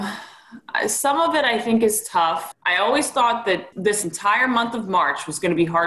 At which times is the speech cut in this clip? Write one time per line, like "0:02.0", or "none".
0:02.5
0:03.7